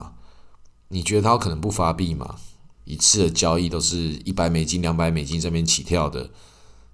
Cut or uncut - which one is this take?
cut